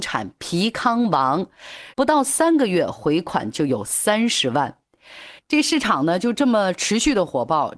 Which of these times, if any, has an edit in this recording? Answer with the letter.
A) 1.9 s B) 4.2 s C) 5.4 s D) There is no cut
A